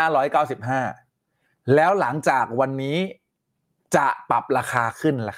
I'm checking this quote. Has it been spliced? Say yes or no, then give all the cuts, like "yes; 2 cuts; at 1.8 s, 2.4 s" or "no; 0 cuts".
no; 0 cuts